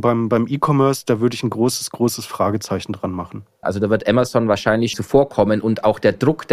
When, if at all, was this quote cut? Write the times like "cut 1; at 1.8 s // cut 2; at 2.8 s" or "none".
cut 1; at 3.6 s // cut 2; at 4.9 s